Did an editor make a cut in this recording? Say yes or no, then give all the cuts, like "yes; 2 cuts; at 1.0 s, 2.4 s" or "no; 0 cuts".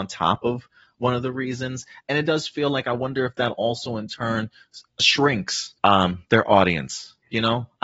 yes; 1 cut; at 5.8 s